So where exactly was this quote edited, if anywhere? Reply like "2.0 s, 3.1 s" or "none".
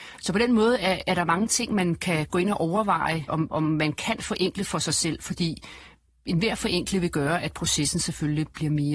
none